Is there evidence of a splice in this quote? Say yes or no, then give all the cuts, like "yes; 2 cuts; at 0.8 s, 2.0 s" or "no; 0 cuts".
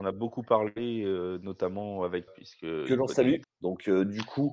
yes; 2 cuts; at 2.3 s, 3.4 s